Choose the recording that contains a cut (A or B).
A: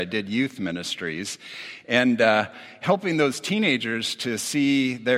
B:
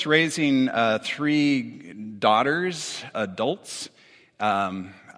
B